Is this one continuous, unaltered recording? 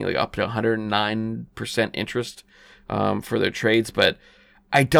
yes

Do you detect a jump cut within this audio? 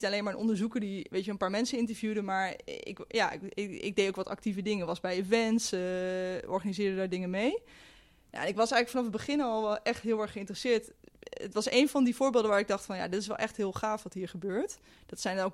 no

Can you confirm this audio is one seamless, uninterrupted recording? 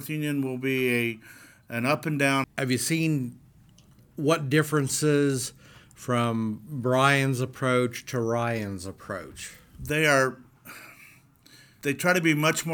no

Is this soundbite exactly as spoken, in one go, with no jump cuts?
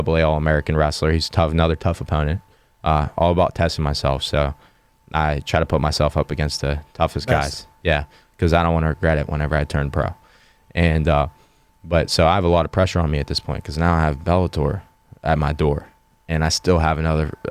yes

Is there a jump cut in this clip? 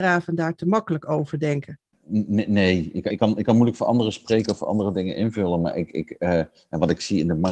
yes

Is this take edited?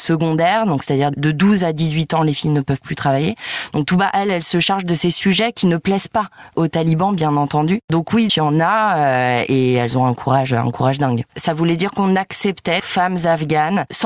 yes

